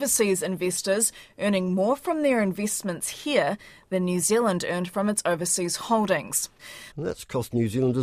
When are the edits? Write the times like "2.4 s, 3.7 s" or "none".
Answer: 6.9 s